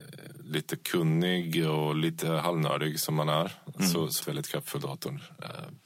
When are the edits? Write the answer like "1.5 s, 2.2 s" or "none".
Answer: 4.2 s